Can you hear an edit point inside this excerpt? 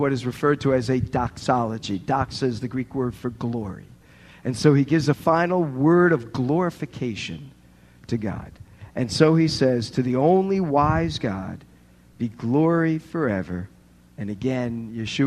no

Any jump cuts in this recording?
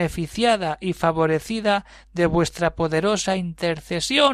no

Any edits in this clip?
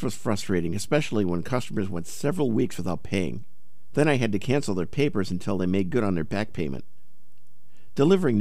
no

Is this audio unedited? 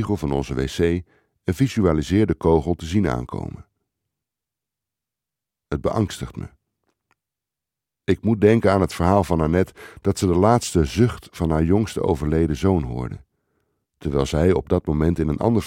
yes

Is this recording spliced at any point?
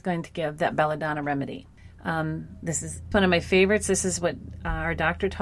yes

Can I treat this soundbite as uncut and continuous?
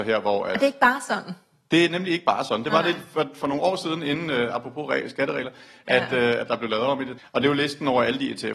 no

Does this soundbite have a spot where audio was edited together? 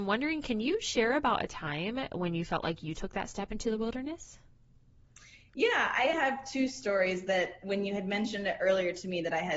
yes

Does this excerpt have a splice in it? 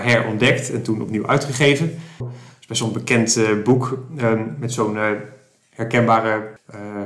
yes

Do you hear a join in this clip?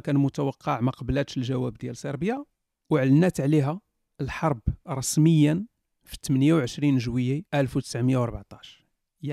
yes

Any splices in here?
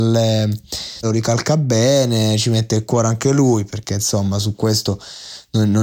yes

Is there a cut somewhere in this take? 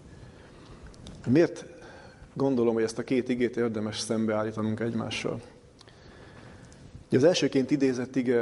no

